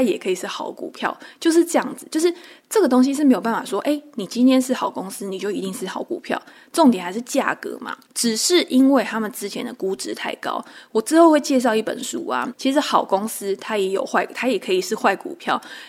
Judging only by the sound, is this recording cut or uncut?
cut